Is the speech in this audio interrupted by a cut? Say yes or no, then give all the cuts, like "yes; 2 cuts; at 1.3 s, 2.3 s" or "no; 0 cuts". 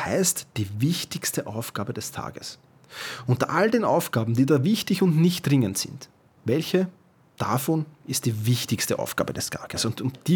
no; 0 cuts